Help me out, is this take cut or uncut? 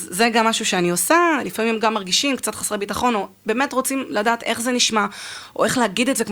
uncut